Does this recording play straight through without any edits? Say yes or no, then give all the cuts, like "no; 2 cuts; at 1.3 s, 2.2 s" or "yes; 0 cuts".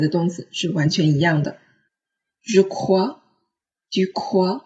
no; 1 cut; at 2.3 s